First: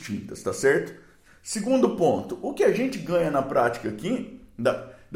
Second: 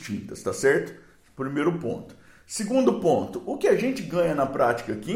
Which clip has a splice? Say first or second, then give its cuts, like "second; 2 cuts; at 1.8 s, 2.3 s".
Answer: first; 1 cut; at 1.3 s